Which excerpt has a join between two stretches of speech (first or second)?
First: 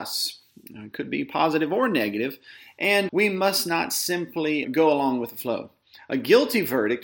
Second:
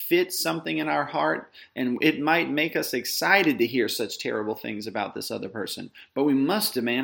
first